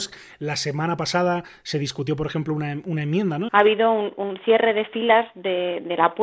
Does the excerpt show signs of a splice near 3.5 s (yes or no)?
yes